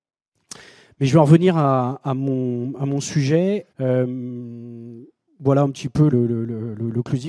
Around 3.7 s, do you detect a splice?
yes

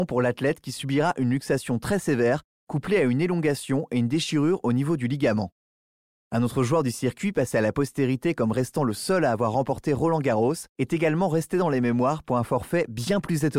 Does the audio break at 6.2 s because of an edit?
no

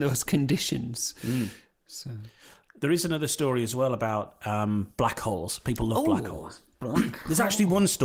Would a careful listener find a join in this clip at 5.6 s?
no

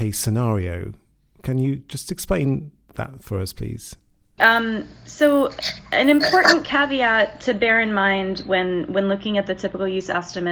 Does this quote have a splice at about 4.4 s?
yes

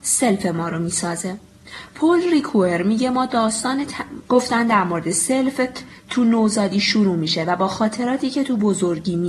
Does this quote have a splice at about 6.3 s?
no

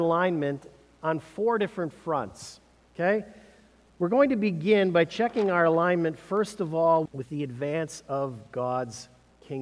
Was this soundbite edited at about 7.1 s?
yes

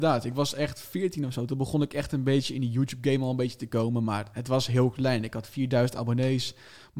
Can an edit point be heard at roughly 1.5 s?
no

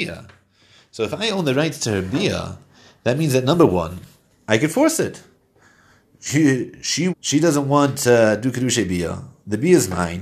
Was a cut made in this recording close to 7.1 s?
yes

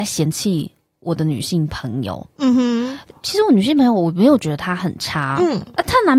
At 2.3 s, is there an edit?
no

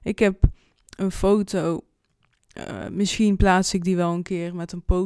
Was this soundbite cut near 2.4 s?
no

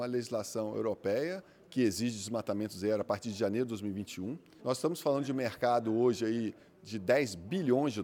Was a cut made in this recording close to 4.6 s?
yes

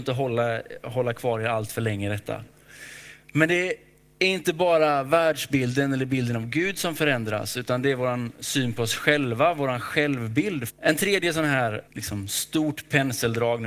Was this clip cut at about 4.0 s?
no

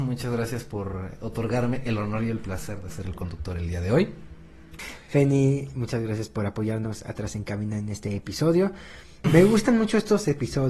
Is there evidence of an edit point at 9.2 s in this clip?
yes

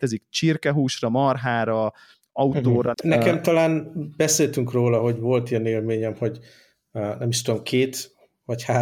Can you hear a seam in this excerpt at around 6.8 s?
no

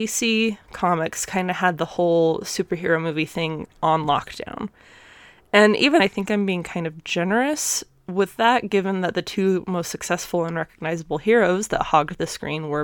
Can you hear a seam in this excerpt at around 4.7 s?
no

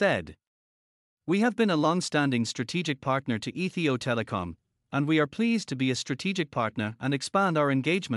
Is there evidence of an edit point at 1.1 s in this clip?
no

